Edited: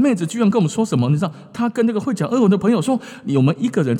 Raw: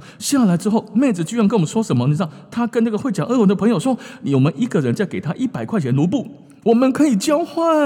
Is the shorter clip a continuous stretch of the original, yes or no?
yes